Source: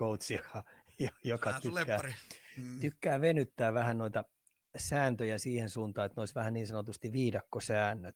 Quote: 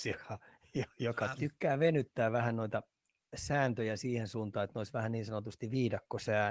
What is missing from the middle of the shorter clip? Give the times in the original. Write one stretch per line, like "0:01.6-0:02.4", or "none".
0:01.6-0:02.8